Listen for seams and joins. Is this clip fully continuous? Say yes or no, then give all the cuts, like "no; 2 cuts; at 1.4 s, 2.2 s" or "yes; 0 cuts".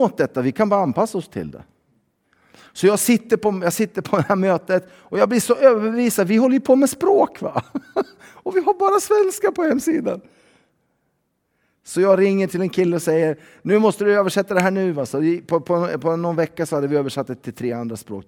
yes; 0 cuts